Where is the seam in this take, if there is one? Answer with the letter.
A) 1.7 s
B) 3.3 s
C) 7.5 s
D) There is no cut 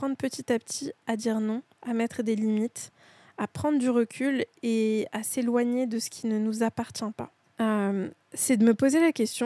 C